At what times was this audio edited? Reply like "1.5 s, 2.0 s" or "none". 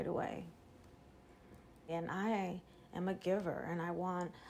1.9 s